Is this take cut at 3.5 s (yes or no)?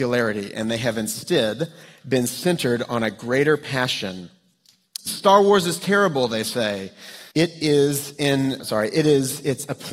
no